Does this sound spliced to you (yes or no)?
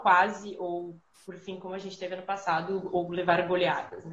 no